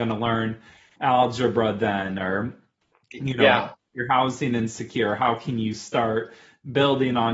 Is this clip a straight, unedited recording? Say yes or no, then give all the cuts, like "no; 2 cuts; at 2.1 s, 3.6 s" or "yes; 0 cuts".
yes; 0 cuts